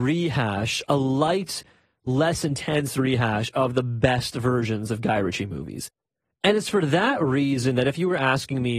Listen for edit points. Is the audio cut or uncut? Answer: uncut